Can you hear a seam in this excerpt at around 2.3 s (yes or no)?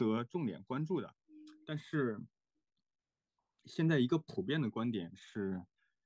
no